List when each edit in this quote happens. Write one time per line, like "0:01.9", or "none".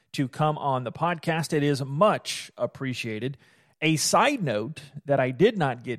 none